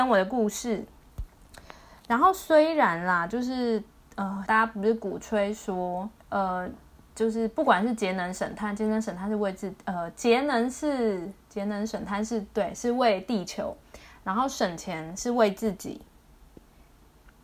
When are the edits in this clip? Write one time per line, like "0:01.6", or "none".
0:04.5
0:06.2